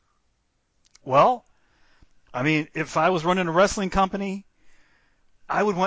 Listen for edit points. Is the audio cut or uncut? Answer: uncut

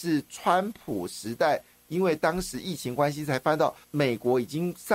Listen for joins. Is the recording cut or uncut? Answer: cut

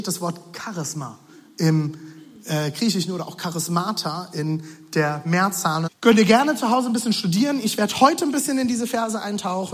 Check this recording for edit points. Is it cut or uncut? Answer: cut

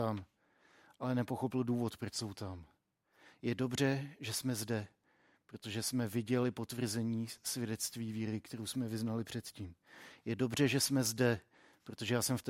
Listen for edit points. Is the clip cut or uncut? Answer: uncut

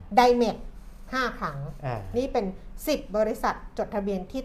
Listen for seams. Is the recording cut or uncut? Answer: uncut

